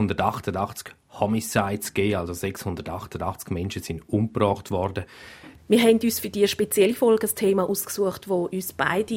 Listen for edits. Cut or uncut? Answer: cut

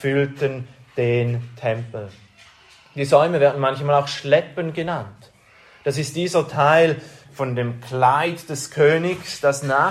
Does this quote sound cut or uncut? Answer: cut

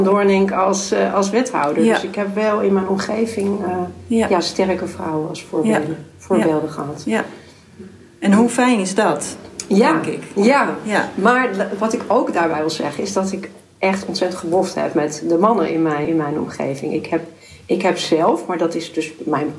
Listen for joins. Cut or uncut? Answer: cut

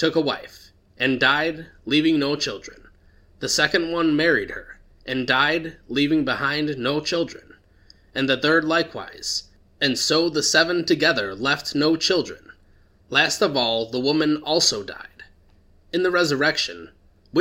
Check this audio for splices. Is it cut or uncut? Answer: uncut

